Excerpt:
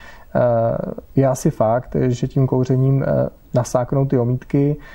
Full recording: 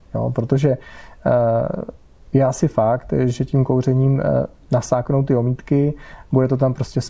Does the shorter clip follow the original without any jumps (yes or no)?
no